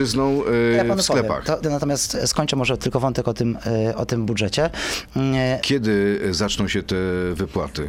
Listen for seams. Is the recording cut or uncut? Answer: cut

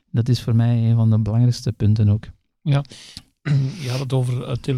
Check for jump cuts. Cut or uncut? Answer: uncut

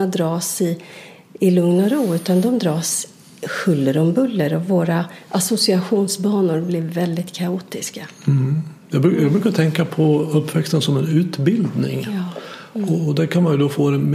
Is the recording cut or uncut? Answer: uncut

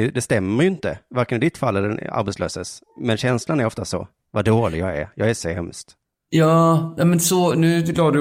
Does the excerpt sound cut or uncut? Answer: uncut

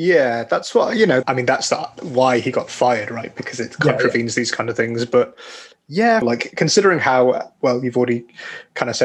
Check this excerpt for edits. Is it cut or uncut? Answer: cut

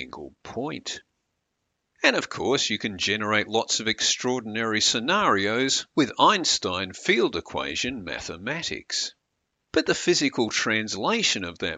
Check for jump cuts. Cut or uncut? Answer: uncut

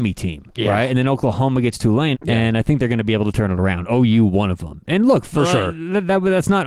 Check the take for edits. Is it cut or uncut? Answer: cut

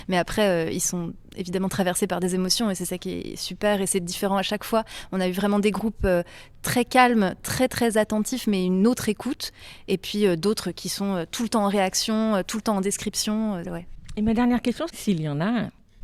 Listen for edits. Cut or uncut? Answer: cut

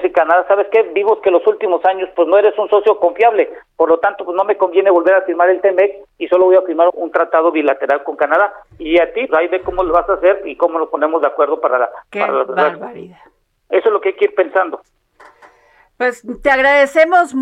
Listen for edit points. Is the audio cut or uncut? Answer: cut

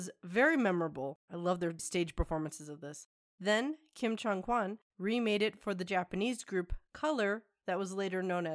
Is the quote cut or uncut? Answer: uncut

